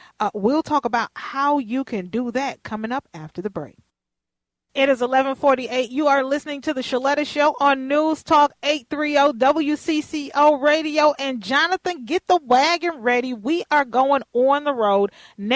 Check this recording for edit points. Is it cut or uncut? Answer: uncut